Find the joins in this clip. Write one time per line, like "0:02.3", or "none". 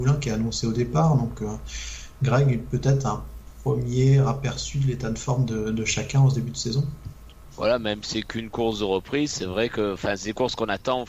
none